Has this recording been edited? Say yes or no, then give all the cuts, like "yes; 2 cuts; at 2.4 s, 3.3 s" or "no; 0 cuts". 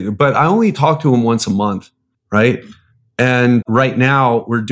yes; 1 cut; at 3.6 s